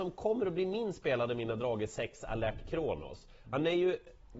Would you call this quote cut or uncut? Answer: uncut